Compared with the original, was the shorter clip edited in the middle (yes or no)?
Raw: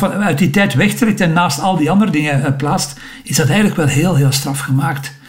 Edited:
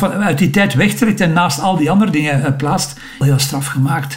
yes